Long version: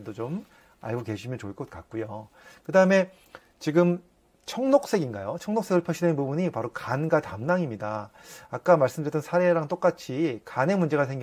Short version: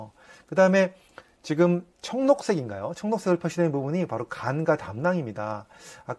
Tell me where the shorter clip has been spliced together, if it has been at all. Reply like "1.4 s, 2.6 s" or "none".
1.9 s